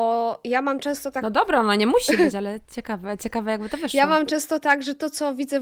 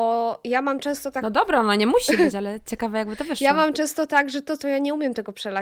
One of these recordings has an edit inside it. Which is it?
second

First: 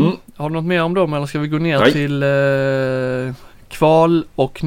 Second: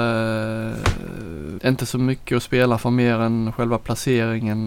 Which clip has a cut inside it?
second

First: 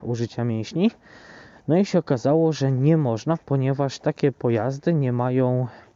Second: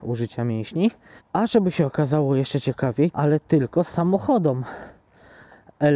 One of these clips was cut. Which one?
second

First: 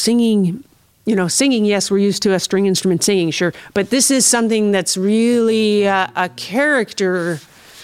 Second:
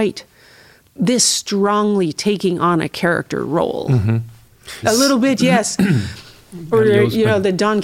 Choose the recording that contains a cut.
second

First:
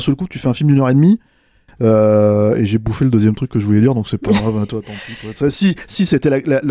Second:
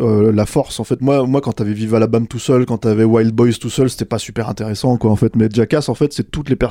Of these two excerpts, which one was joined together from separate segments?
first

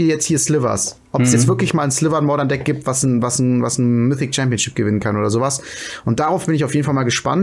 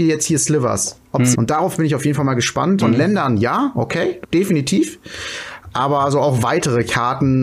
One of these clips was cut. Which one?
second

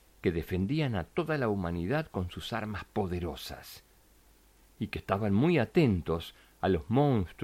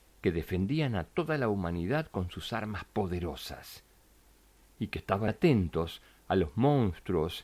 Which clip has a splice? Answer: second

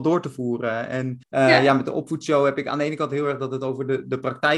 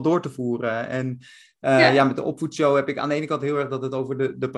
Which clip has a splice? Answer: first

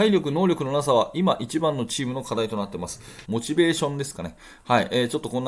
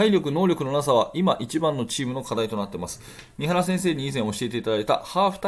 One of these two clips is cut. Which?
first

